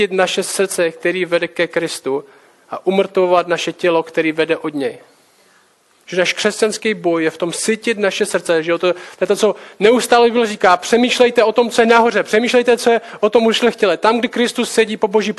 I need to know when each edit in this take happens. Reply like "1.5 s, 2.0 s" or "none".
none

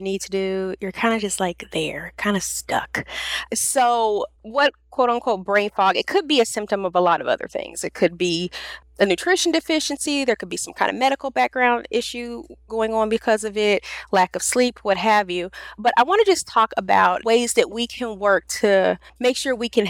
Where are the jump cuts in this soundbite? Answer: 4.4 s

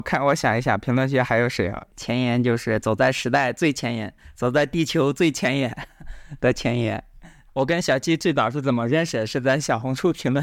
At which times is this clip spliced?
1.9 s, 7.5 s

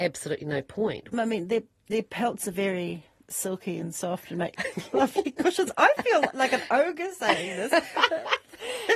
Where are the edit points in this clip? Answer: 1.1 s

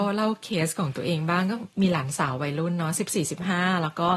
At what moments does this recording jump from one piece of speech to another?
none

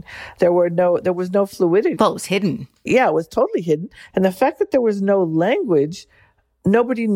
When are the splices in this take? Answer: 2.0 s, 4.1 s

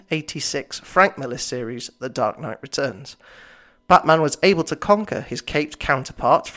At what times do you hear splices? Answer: none

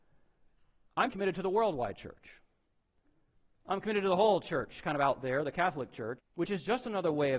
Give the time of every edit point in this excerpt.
1.1 s, 6.2 s

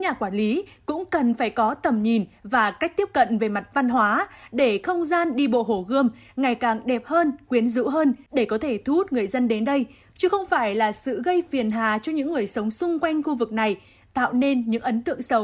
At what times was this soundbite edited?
none

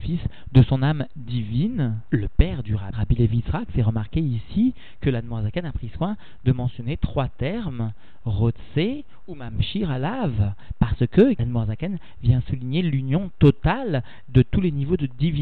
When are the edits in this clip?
2.9 s, 9.2 s, 11.3 s

